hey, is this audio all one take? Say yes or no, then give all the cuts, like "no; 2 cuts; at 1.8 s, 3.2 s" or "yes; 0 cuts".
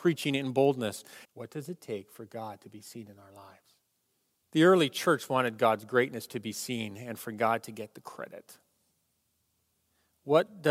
no; 2 cuts; at 1.2 s, 4.4 s